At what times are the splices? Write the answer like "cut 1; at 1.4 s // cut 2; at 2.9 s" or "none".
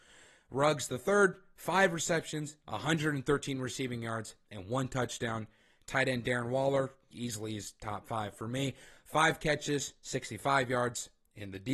cut 1; at 7.1 s